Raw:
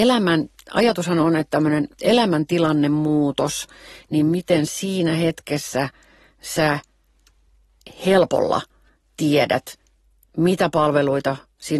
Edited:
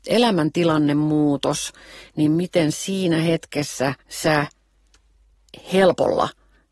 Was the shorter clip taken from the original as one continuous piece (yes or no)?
no